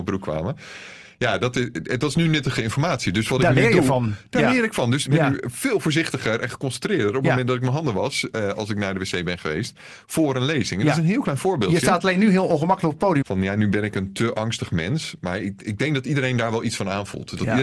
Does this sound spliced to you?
yes; 2 cuts; at 5.1 s, 13.2 s

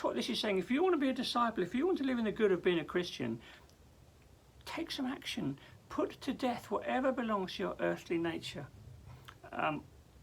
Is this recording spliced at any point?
no; 0 cuts

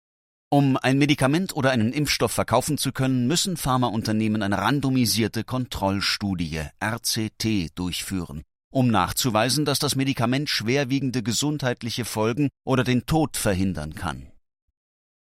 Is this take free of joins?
yes; 0 cuts

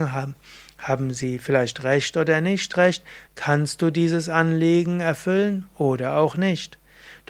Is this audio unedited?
no; 1 cut; at 3.3 s

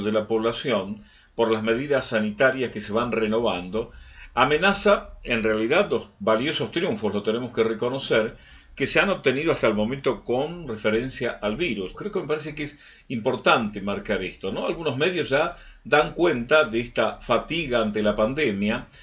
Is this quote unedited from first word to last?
no; 1 cut; at 11.9 s

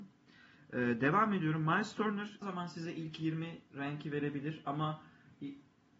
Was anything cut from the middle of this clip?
yes; 1 cut; at 2.4 s

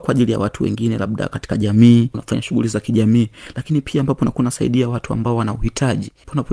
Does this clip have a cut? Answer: yes; 1 cut; at 2.1 s

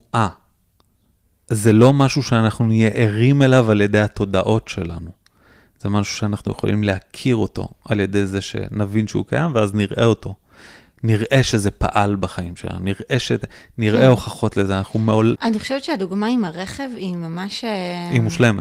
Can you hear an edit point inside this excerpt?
yes; 1 cut; at 15.3 s

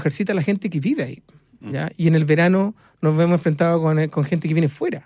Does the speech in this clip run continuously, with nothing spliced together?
yes; 0 cuts

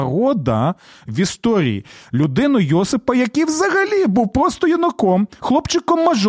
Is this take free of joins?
yes; 0 cuts

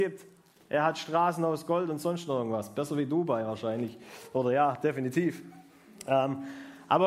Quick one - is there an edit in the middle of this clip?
no; 0 cuts

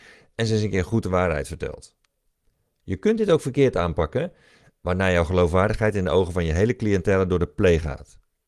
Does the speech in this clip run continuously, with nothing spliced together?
yes; 0 cuts

